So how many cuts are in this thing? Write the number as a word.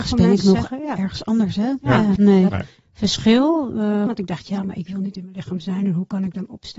two